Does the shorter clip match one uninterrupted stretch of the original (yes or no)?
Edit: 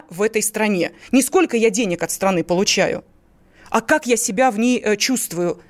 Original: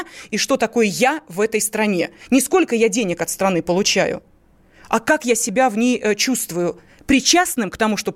yes